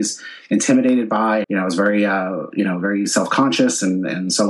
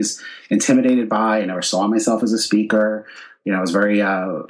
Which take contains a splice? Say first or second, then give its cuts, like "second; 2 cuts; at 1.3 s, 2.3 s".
first; 1 cut; at 1.4 s